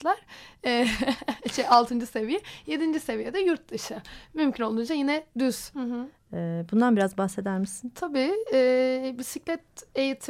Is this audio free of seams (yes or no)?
no